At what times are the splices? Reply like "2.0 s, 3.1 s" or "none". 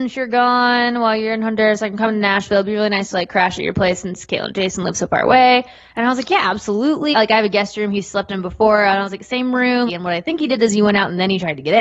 7.1 s, 9.9 s